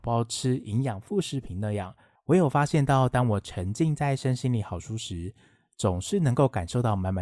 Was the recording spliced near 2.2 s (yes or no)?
yes